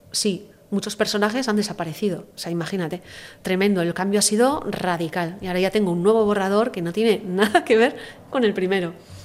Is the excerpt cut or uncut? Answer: uncut